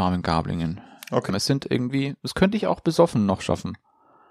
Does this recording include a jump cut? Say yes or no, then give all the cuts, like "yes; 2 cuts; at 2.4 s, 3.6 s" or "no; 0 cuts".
yes; 1 cut; at 1.3 s